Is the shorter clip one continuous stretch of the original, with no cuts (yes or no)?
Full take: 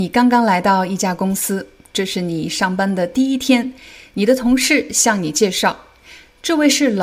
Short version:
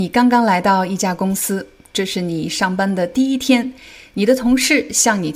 yes